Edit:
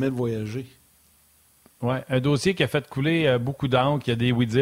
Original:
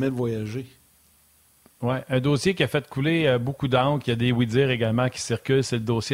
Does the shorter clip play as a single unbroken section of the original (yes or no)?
yes